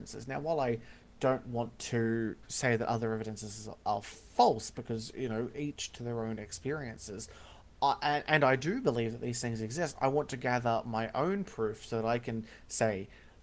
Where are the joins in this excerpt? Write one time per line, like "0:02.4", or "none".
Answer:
none